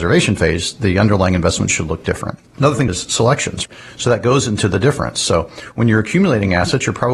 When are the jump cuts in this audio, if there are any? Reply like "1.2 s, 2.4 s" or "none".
2.5 s